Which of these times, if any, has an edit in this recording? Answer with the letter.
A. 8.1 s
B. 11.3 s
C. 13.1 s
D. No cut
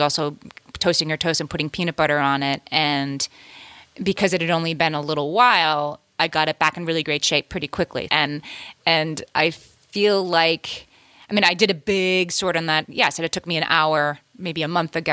A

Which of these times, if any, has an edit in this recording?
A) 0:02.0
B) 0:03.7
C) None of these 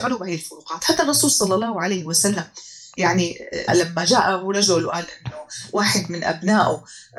B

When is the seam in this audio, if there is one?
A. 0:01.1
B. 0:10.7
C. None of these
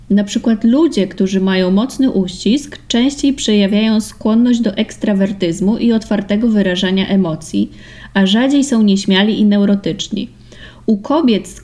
C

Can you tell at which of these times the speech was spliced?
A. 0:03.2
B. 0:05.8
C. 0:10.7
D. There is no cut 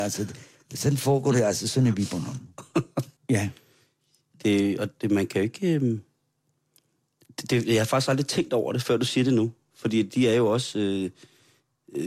A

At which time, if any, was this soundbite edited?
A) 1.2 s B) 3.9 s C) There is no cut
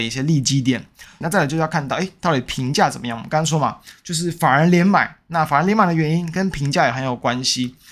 A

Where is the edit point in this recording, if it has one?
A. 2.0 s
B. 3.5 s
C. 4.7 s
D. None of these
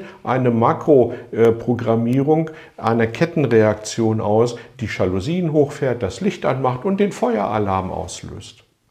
C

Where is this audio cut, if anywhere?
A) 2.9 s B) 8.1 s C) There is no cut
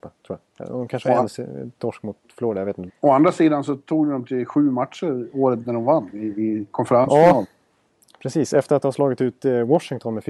A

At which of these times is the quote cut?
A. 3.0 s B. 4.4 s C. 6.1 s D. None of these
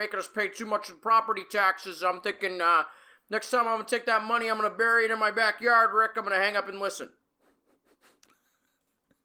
D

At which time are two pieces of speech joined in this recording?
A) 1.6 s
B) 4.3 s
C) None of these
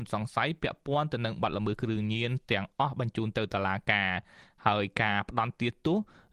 C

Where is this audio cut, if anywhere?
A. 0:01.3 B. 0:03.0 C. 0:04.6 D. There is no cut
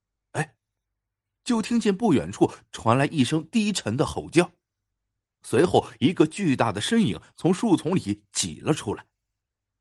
A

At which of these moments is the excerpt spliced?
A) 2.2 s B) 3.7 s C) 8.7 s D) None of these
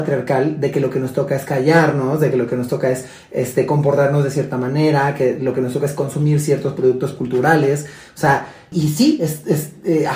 C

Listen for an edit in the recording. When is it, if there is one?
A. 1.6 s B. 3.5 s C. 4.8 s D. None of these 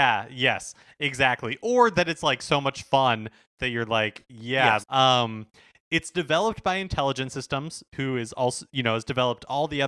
C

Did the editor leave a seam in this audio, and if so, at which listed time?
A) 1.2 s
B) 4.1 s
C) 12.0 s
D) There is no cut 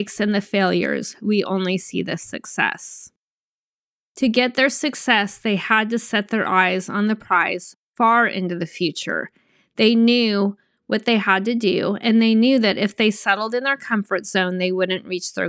D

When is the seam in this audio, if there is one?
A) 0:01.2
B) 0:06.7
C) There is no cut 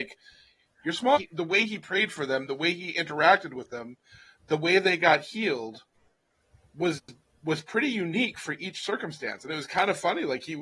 A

